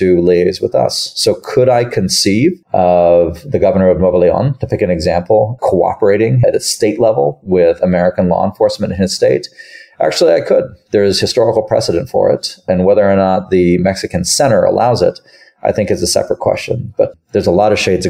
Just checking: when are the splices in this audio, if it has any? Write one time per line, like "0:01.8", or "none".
0:02.6